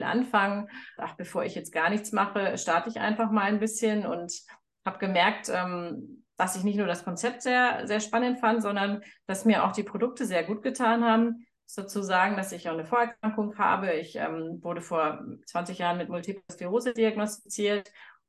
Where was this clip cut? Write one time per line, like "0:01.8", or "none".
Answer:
0:01.0